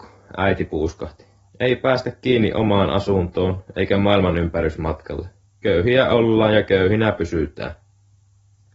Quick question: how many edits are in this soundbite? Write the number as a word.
two